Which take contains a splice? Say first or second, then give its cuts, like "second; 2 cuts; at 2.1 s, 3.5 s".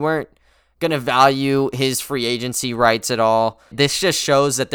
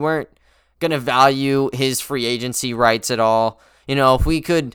first; 1 cut; at 3.7 s